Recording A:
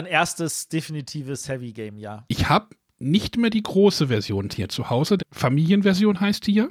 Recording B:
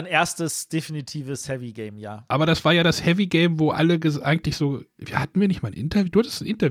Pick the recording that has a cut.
A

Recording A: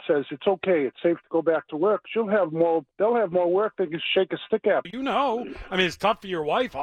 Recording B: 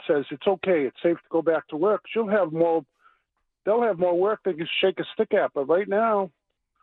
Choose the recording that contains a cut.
A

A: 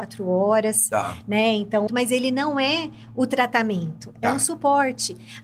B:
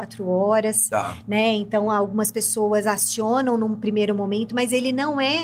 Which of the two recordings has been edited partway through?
A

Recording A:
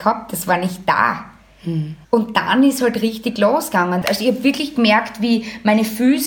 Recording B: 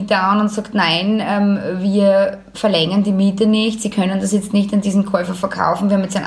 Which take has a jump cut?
A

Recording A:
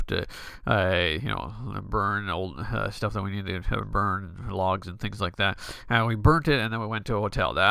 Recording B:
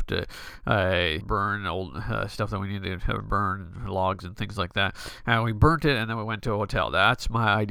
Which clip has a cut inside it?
B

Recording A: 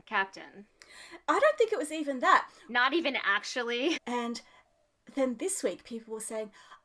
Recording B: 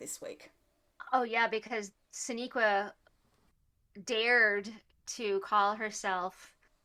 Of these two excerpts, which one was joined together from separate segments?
A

